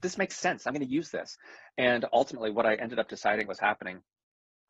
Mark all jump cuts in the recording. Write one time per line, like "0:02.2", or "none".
none

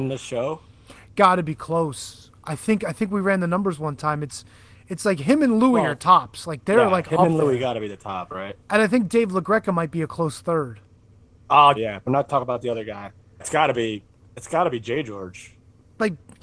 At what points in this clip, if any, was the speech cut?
0:11.7
0:13.4

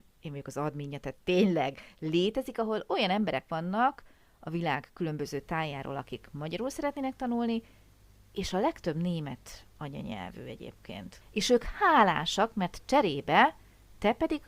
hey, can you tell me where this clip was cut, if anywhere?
0:11.2

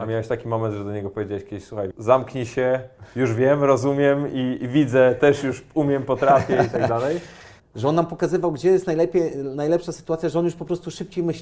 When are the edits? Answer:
0:01.9
0:07.6

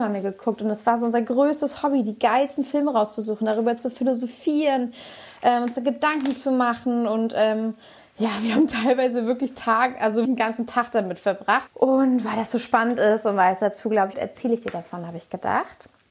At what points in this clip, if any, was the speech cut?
0:10.2
0:11.7
0:14.1

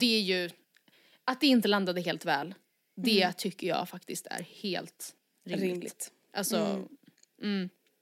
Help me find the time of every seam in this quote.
none

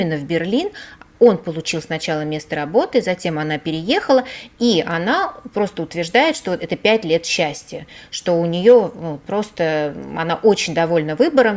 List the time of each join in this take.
none

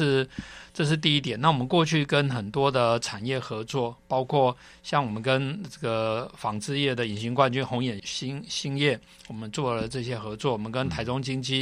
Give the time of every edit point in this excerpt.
0:08.0

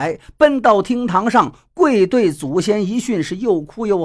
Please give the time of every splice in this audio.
none

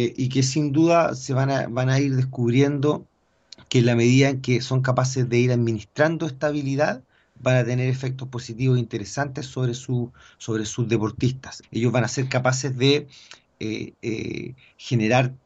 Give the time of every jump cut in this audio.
0:11.6

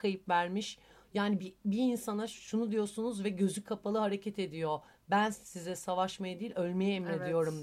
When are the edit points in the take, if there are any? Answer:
none

